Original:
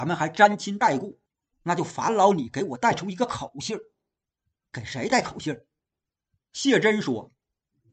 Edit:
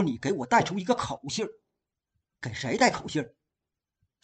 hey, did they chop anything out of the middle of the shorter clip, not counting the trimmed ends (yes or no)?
no